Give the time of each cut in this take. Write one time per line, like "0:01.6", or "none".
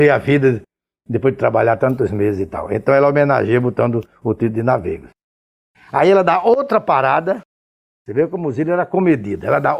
0:05.7